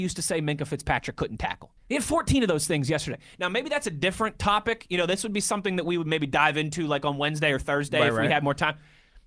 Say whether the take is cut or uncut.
cut